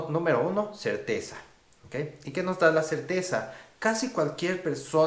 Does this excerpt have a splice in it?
no; 0 cuts

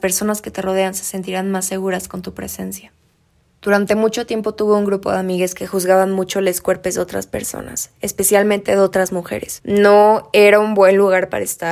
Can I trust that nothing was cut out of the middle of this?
yes; 0 cuts

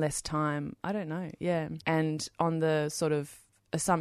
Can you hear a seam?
yes; 1 cut; at 1.8 s

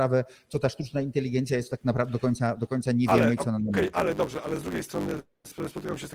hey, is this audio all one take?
yes; 0 cuts

